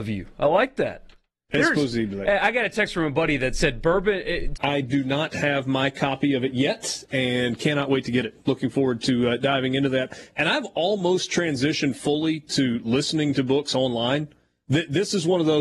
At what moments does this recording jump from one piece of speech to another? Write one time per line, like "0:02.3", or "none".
0:01.4
0:04.6
0:14.6